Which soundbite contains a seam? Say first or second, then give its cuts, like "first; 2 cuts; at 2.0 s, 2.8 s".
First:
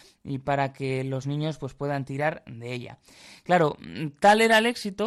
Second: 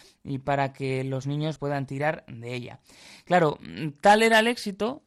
second; 1 cut; at 1.6 s